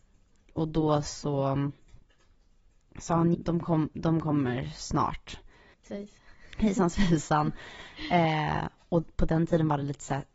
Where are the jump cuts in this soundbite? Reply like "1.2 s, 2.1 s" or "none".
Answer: 3.3 s, 5.8 s